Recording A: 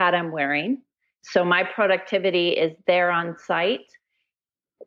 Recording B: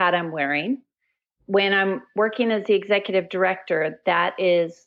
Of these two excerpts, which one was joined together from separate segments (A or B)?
A